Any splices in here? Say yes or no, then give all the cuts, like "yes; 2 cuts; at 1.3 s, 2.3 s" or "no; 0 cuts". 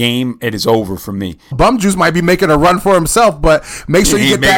yes; 1 cut; at 1.5 s